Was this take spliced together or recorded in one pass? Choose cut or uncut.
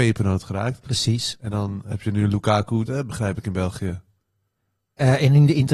cut